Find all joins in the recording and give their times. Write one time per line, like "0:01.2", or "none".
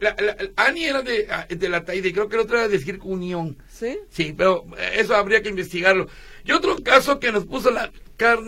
none